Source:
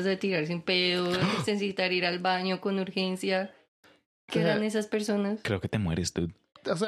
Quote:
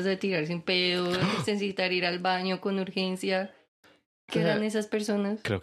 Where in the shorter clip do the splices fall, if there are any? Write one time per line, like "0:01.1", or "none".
none

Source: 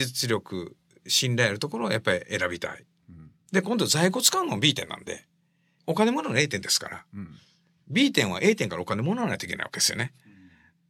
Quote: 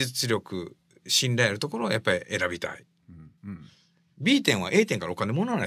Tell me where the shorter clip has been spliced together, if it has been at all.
0:03.4

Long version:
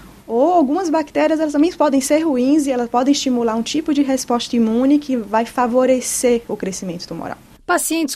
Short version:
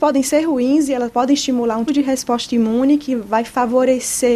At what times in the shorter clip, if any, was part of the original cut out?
0:01.9

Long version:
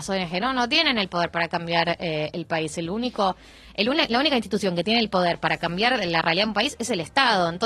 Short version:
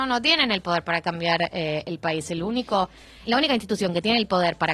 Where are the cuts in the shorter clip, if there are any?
0:03.3

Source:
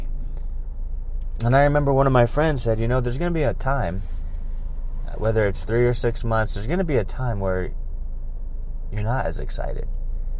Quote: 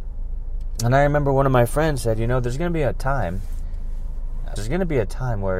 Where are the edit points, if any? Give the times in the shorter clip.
0:04.6

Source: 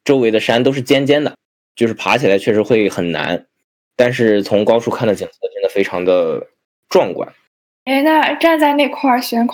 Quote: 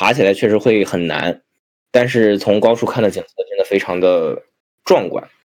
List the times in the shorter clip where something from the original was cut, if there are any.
none

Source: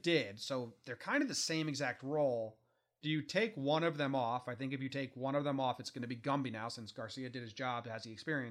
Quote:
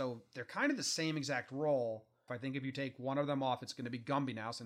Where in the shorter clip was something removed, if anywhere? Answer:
0:02.3

